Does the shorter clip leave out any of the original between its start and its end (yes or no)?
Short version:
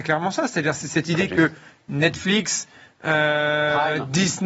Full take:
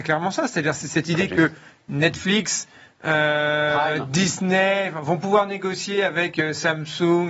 no